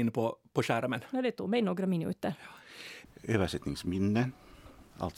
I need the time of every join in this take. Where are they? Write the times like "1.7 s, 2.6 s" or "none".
3.1 s